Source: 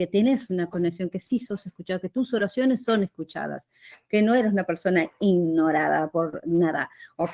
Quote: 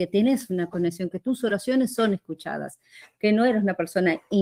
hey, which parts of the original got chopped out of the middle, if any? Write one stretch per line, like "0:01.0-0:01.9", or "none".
0:01.1-0:02.0